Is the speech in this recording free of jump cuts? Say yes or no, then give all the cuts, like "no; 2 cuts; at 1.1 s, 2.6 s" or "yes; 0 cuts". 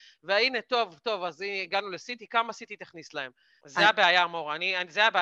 no; 1 cut; at 3.6 s